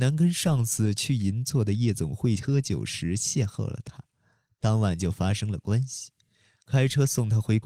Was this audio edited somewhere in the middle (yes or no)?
no